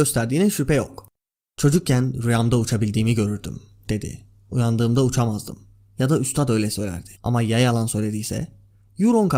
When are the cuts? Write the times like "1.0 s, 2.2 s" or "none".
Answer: 7.1 s